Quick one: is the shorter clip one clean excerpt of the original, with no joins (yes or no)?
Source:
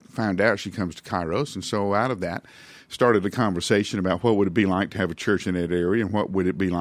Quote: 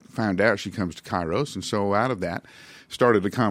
yes